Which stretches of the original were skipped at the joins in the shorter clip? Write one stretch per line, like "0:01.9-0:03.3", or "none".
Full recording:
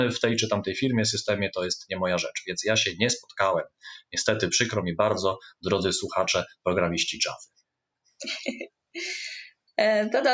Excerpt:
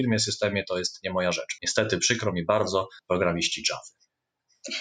0:02.4-0:04.1
0:05.5-0:06.6